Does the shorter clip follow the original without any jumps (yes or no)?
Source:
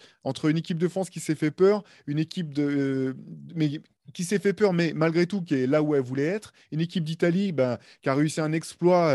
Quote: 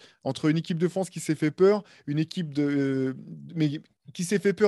yes